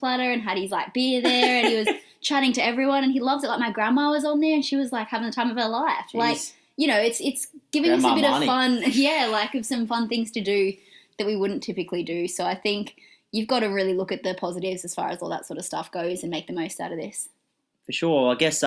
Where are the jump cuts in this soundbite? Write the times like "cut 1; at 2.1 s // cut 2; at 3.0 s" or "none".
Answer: none